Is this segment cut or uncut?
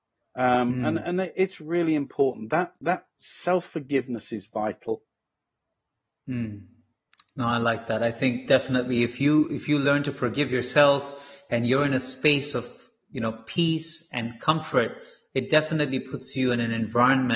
uncut